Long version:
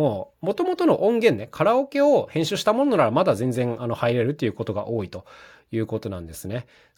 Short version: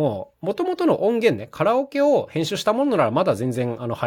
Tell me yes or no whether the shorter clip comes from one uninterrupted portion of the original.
yes